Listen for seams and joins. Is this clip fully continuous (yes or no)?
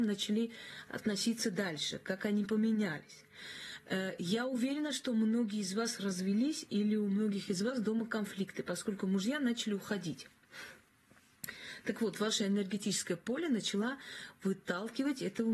yes